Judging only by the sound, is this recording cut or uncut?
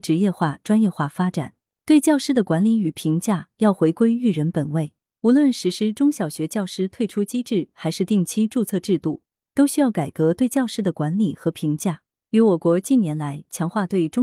cut